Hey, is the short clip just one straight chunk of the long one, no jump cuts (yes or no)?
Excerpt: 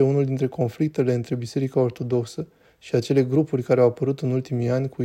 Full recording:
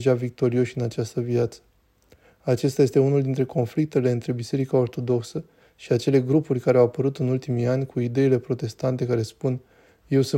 yes